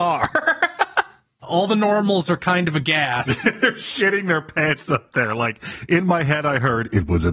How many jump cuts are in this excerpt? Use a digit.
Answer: 0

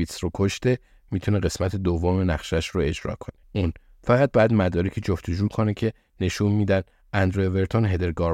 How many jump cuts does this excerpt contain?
1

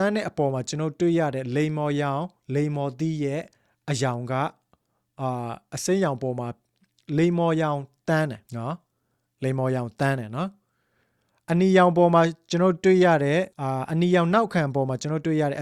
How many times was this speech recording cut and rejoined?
2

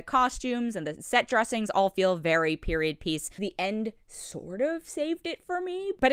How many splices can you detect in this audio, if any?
1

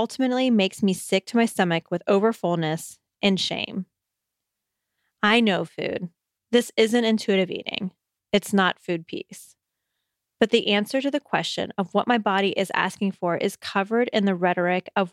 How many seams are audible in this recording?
0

